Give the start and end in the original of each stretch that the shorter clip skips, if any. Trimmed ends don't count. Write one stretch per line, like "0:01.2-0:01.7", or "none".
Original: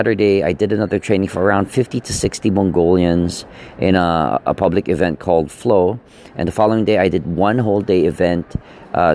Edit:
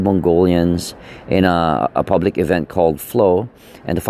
none

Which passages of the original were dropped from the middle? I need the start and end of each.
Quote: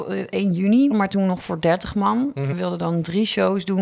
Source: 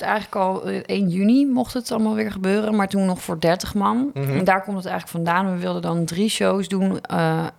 0:01.5-0:02.7
0:04.3-0:05.5

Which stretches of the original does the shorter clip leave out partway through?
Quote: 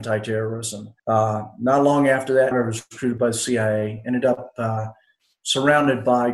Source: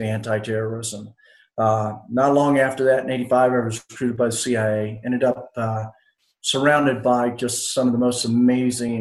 0:01.2-0:01.5
0:03.0-0:03.5

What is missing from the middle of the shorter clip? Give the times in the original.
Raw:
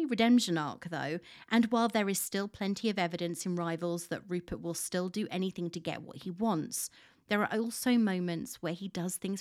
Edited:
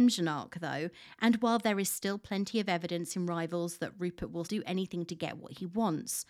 0:04.7-0:05.1

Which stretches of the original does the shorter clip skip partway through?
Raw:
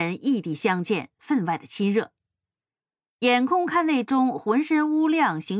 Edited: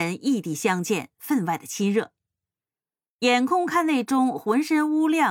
none

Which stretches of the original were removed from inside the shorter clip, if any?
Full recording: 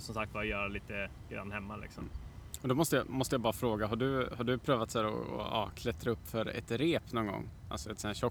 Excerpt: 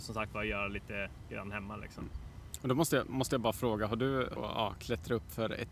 0:04.4-0:05.3

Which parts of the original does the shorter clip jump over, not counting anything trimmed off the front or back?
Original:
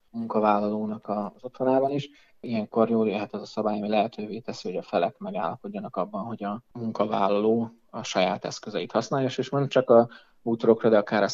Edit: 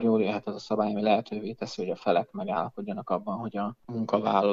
none

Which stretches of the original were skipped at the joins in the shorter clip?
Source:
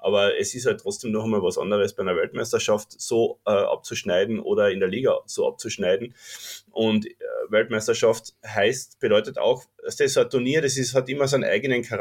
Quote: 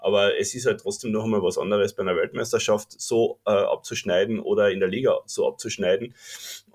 none

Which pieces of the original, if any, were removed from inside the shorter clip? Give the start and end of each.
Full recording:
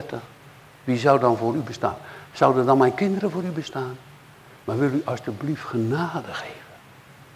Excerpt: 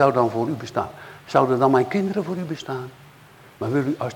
none

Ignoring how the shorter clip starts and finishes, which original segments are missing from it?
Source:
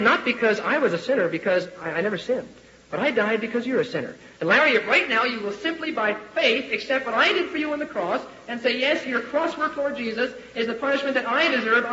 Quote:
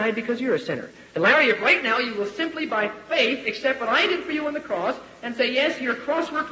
none

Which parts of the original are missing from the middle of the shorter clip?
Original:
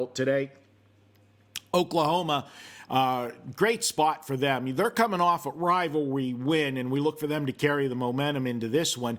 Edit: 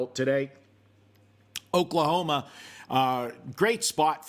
none

